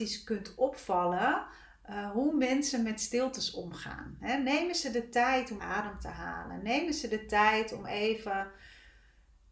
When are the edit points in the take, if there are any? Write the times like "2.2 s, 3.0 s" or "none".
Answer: 5.6 s